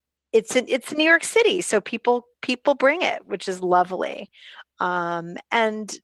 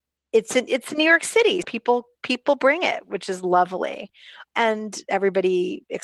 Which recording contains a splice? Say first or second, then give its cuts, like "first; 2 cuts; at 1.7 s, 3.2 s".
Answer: second; 2 cuts; at 1.6 s, 4.5 s